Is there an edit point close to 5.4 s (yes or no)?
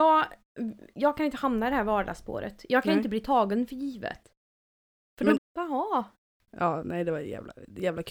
yes